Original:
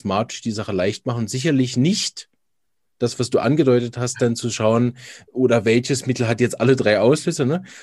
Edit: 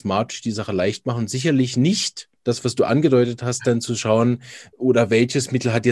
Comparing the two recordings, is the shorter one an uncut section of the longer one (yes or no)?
no